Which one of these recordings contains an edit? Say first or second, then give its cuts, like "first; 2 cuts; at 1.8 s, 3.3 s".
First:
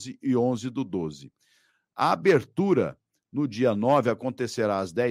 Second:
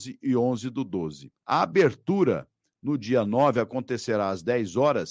second; 1 cut; at 1.4 s